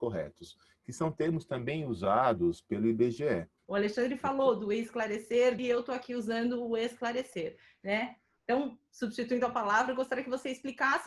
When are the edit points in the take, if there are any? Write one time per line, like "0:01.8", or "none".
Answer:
0:03.6
0:05.6